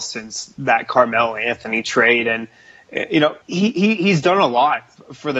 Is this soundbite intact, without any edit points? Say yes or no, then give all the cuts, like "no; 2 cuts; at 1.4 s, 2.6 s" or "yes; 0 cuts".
no; 1 cut; at 3.4 s